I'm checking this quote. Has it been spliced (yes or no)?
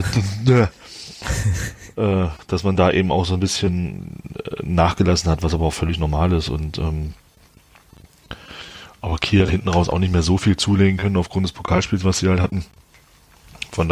no